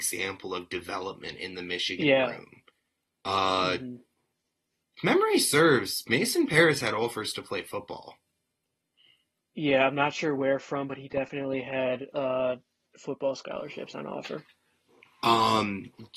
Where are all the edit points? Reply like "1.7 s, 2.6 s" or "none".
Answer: none